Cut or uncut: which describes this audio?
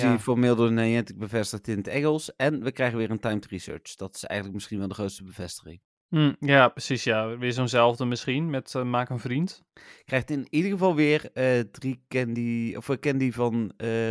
uncut